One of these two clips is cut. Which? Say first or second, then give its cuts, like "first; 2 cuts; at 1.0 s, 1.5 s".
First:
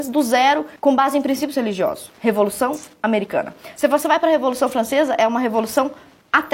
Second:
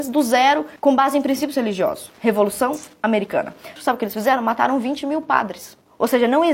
second; 1 cut; at 3.8 s